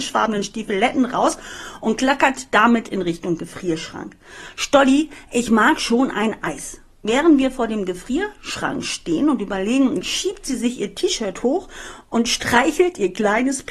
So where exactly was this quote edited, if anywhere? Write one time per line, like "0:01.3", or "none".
0:10.0